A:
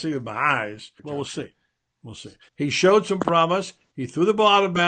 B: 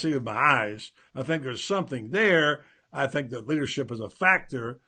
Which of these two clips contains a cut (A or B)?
A